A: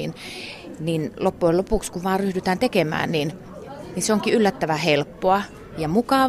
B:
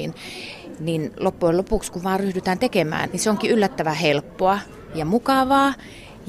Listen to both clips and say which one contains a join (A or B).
B